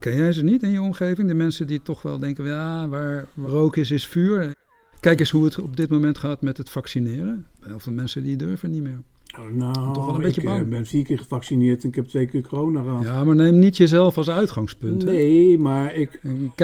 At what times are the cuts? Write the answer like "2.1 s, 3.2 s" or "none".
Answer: none